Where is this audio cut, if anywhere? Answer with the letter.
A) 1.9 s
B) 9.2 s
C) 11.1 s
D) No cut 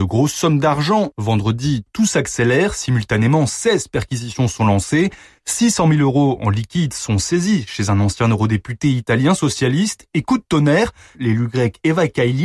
C